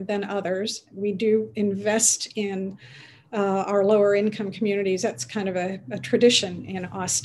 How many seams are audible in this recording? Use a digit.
0